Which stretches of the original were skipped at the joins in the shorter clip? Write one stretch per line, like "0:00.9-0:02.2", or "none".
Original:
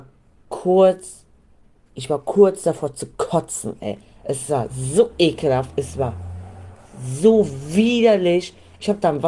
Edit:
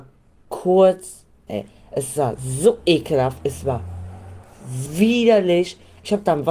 0:01.5-0:03.8
0:07.2-0:07.6